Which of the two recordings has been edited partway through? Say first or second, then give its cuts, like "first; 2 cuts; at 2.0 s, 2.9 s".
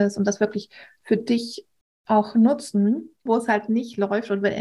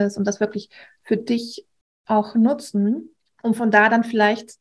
first; 1 cut; at 3.3 s